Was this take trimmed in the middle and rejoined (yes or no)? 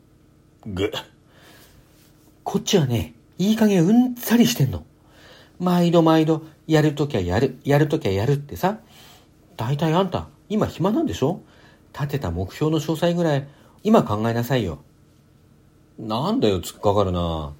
yes